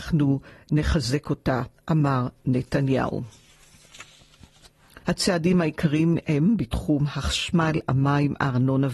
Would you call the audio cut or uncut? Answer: cut